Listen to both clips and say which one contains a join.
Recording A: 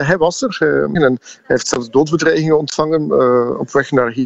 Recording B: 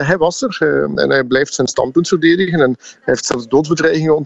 A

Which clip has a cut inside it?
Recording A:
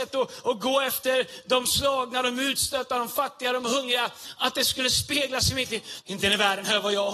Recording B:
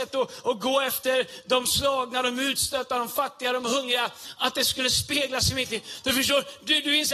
A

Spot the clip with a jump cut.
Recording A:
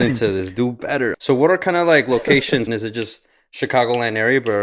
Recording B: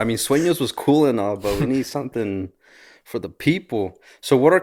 A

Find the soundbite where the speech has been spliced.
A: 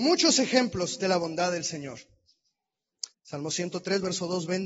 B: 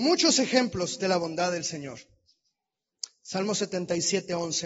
A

